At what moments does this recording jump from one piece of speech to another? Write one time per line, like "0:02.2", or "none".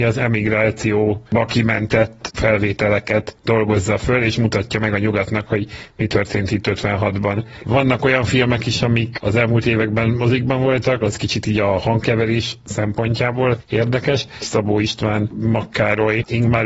0:07.6
0:11.0
0:14.4